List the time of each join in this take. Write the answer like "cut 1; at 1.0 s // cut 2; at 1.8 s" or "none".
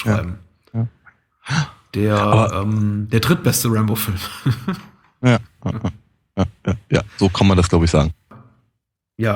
cut 1; at 5.6 s